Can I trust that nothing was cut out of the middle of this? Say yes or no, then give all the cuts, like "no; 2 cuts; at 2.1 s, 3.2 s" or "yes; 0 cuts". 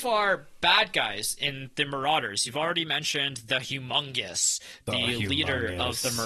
yes; 0 cuts